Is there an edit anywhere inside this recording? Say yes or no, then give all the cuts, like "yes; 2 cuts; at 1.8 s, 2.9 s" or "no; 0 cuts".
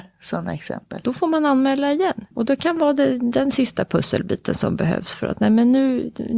yes; 2 cuts; at 1.0 s, 2.3 s